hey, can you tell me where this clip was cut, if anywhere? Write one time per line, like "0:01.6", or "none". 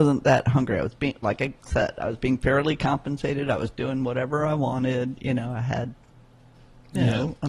none

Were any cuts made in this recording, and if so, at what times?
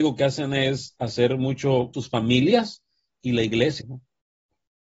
0:01.9
0:03.8

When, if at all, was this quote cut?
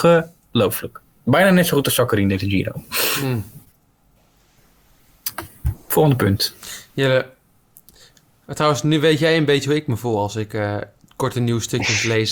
none

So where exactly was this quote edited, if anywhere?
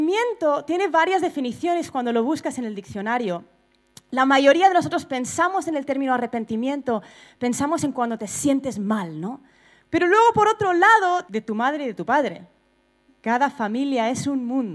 0:09.8
0:11.3
0:13.1

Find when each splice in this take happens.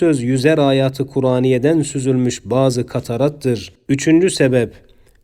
0:03.9

